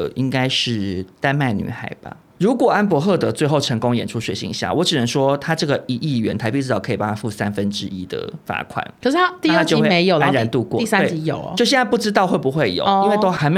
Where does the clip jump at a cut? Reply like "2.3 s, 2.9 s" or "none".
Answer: 2.4 s